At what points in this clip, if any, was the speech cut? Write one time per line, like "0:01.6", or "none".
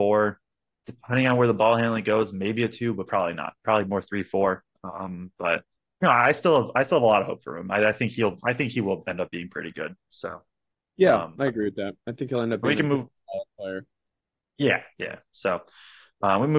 none